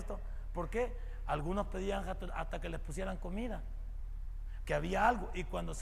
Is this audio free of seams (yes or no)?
no